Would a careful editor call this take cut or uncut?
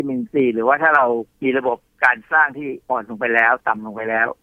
cut